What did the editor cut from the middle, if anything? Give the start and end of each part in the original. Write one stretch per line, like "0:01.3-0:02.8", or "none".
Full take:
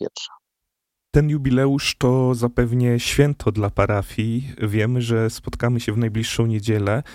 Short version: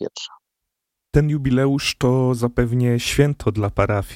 none